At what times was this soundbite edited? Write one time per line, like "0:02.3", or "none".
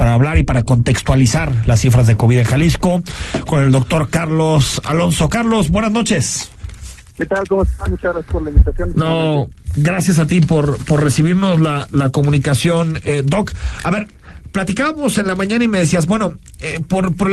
0:08.9